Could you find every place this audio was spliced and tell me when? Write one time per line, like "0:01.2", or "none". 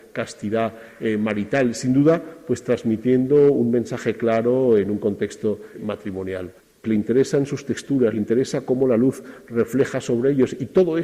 0:06.8